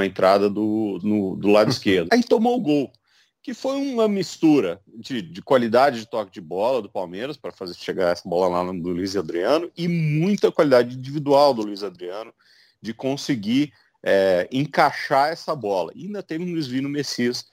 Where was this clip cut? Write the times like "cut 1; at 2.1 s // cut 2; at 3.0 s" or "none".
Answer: cut 1; at 1.0 s // cut 2; at 2.1 s